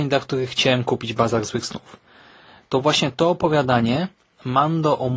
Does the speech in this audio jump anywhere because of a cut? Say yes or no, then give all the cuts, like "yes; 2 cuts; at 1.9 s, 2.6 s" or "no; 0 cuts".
no; 0 cuts